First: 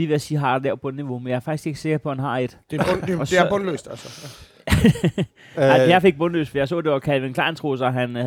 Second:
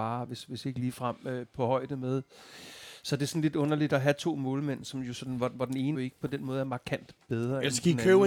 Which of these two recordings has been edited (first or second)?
second